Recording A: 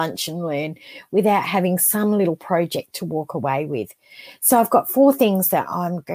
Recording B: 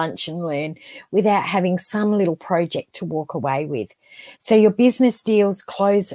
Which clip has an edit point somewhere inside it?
B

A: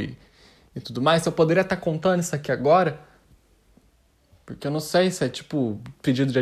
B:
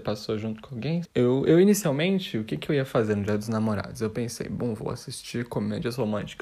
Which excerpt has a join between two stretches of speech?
B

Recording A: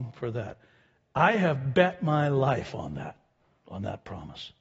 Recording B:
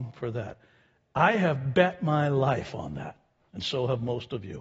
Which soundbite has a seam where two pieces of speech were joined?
B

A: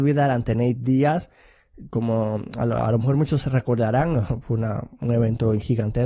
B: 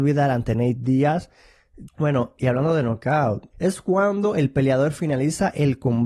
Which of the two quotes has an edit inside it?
B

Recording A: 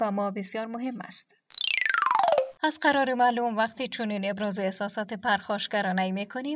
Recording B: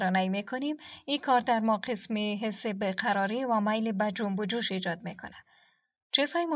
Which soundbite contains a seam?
A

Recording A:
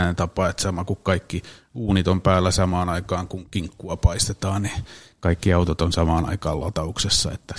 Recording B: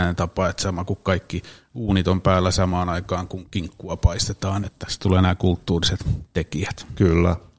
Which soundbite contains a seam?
B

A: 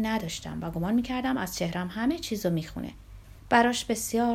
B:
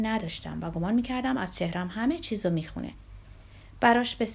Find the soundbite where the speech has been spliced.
A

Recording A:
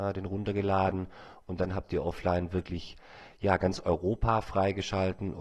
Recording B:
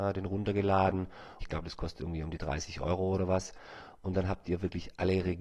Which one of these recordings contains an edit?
B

